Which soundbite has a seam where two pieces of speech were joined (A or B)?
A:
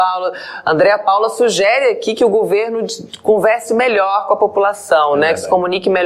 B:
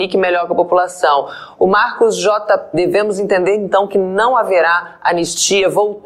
B